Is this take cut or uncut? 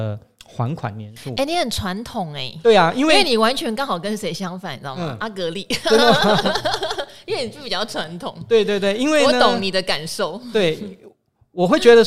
uncut